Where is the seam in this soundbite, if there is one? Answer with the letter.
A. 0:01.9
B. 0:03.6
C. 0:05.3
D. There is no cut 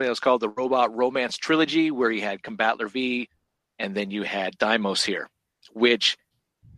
B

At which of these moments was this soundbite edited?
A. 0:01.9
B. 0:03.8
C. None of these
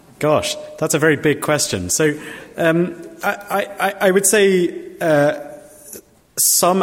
C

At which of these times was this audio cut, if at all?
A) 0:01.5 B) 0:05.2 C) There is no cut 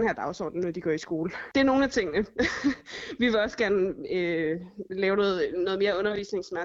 A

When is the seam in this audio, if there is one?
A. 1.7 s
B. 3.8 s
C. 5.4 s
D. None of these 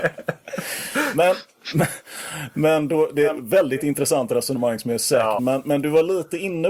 C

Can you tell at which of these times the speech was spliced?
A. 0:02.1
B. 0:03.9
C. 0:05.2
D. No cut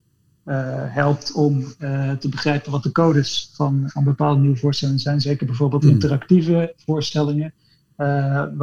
B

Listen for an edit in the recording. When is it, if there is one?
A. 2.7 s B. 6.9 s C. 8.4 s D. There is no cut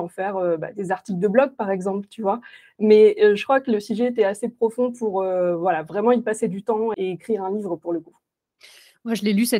B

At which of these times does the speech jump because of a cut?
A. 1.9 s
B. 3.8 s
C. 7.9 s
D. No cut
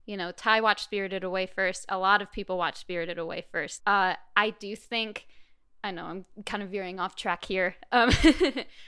B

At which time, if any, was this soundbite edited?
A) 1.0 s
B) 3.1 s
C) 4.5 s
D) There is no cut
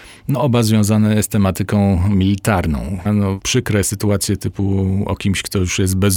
B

